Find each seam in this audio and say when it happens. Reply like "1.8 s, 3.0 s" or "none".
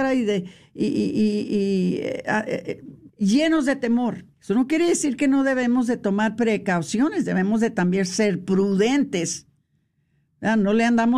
3.1 s, 4.3 s